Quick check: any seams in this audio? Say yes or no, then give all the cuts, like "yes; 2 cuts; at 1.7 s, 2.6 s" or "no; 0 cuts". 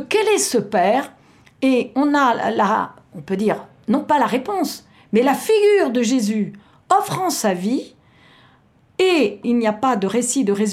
no; 0 cuts